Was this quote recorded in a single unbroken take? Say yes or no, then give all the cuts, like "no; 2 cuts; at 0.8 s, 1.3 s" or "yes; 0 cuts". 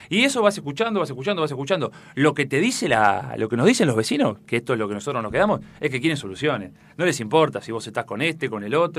yes; 0 cuts